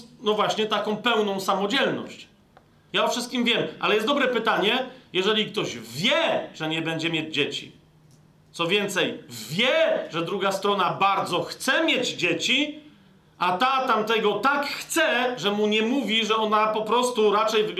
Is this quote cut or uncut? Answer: cut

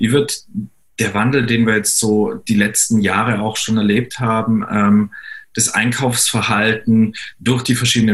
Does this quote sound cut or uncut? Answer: uncut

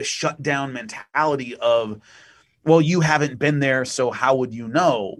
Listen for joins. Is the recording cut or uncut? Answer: uncut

